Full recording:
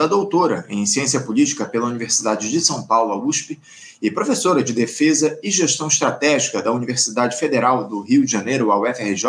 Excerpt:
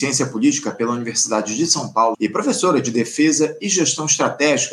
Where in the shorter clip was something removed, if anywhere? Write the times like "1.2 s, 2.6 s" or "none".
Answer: 2.1 s